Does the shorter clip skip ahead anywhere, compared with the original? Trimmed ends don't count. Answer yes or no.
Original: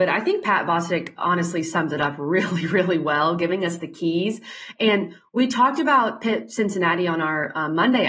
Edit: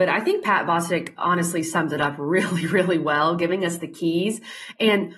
no